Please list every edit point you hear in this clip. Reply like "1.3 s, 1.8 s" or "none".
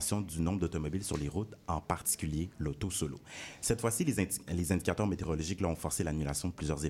none